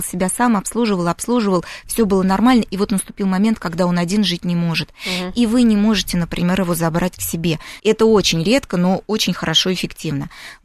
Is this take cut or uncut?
cut